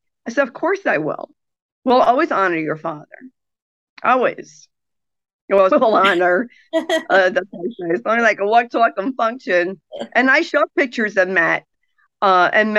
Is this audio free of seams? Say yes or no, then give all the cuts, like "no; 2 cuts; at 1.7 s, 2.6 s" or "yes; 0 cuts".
no; 1 cut; at 5.7 s